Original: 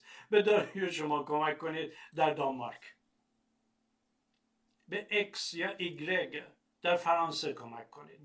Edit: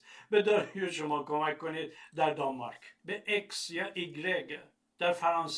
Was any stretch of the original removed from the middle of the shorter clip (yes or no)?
yes